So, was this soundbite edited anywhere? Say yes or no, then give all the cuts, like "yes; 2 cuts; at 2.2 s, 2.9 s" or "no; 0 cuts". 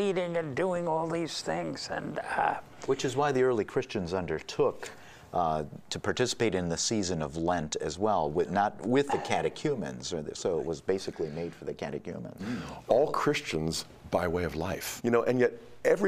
yes; 2 cuts; at 12.4 s, 15.0 s